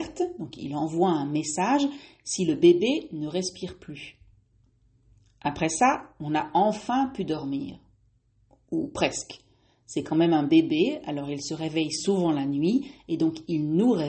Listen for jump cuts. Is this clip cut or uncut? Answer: uncut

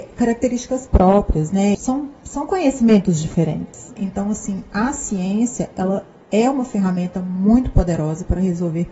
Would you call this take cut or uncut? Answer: cut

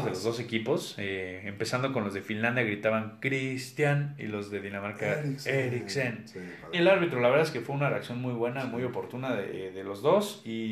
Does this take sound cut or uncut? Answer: cut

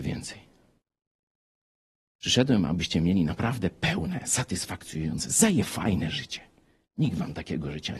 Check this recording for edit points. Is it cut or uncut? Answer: uncut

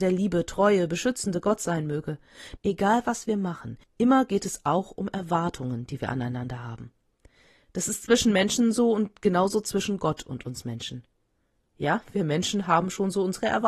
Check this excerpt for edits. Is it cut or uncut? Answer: cut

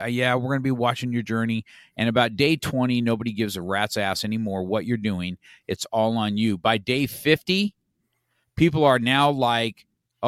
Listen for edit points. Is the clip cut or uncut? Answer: uncut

